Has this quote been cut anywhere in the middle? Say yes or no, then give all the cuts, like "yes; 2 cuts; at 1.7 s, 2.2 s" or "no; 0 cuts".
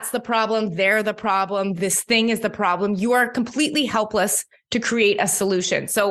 no; 0 cuts